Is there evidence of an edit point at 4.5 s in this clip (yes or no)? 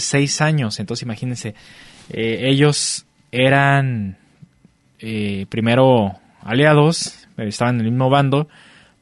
no